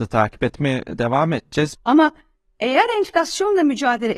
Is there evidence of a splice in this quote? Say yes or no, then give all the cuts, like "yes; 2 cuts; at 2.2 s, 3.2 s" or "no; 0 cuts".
yes; 1 cut; at 1.7 s